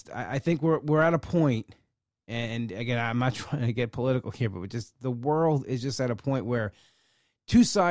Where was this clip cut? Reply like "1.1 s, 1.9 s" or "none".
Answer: none